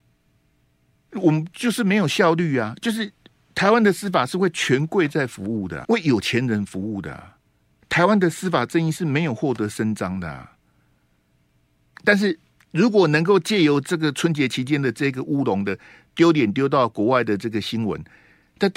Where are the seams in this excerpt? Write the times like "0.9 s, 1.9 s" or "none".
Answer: 5.8 s, 11.9 s

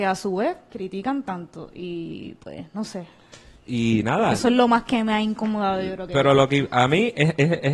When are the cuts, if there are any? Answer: none

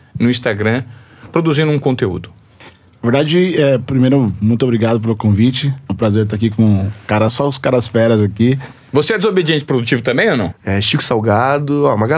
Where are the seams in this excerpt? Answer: 7.3 s, 10.5 s

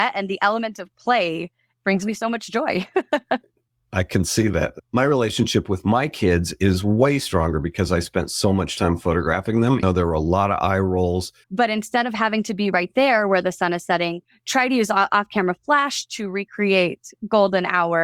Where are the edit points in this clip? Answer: 9.8 s, 11.4 s

